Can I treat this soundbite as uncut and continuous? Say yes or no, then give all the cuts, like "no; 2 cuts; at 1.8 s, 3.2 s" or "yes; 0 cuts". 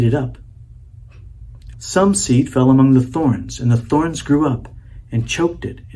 no; 1 cut; at 1.7 s